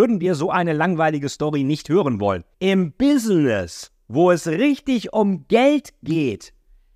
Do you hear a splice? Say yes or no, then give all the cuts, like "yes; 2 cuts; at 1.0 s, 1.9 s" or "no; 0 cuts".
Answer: yes; 1 cut; at 2.5 s